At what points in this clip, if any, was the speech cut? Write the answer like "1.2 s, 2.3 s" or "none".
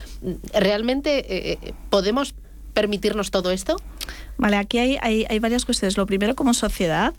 none